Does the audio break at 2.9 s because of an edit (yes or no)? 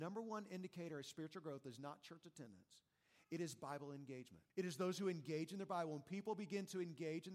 no